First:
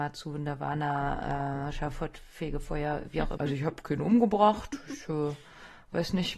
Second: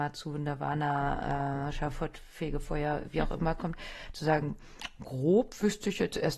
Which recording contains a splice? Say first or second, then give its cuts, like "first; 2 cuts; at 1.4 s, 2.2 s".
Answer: first; 1 cut; at 3.4 s